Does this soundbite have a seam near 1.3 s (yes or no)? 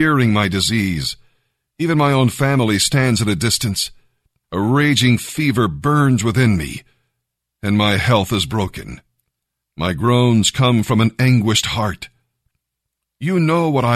no